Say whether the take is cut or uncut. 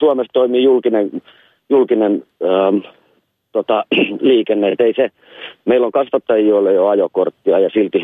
uncut